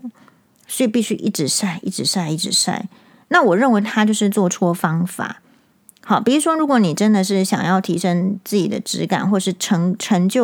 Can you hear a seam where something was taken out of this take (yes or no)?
no